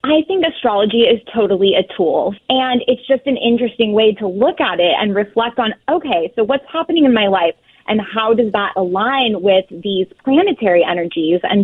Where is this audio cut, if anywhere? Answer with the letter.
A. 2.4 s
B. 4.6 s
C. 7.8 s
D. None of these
A